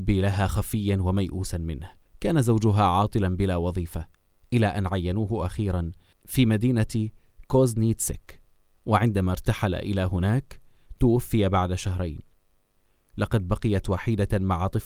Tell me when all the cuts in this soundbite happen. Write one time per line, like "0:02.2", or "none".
none